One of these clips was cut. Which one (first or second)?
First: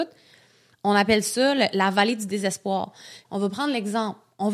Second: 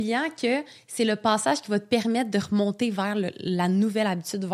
first